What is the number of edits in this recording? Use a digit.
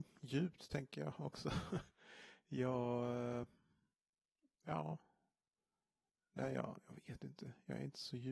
0